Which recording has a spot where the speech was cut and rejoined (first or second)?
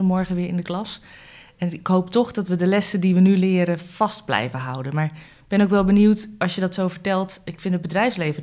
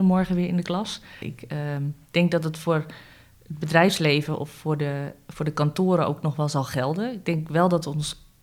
second